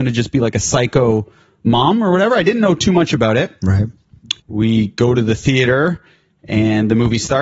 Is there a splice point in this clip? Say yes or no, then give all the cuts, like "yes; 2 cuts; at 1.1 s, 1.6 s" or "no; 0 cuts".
yes; 1 cut; at 4.4 s